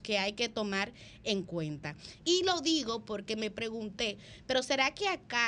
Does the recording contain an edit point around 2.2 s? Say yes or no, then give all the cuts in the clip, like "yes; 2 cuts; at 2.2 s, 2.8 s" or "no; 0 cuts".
yes; 1 cut; at 2.2 s